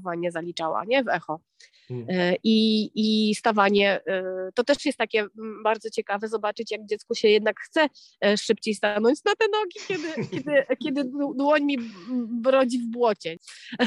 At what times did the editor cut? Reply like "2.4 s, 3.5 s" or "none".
none